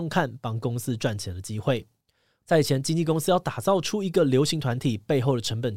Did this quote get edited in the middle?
yes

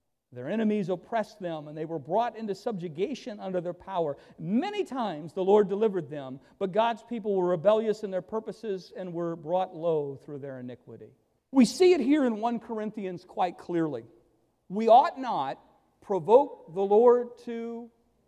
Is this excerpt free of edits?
no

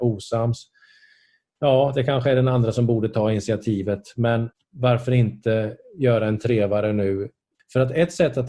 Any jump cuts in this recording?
no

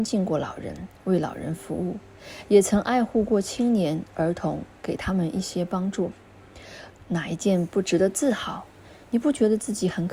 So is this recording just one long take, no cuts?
no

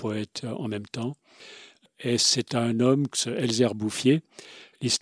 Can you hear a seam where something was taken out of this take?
yes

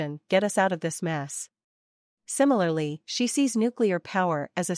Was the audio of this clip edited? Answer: yes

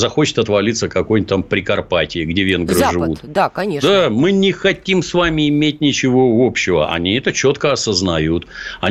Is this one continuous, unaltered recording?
yes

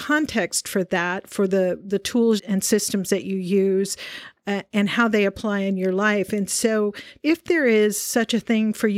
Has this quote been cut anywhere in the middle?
yes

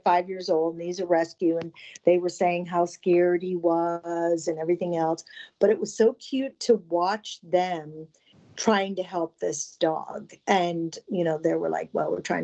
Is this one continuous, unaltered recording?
yes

